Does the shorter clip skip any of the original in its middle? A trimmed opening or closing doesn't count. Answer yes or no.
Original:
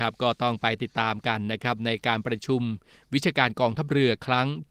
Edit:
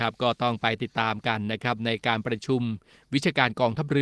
no